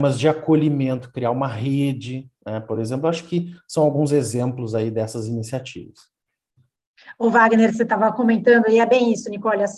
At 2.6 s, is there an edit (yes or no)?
no